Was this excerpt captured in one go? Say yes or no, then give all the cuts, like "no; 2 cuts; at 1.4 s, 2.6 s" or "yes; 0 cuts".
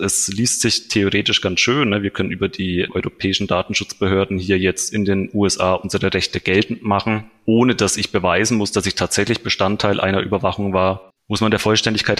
no; 1 cut; at 11.1 s